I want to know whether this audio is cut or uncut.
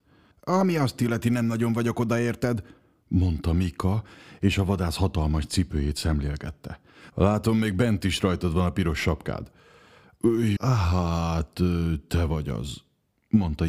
cut